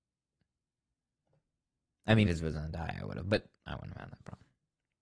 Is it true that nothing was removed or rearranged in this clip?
no; 2 cuts; at 2.2 s, 3.6 s

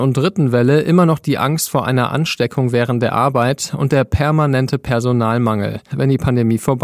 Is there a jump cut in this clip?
yes; 1 cut; at 5.9 s

